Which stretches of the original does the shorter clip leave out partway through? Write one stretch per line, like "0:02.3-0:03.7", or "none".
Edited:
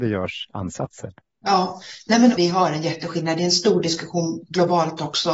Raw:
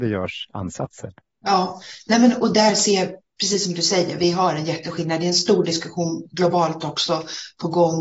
0:02.4-0:04.2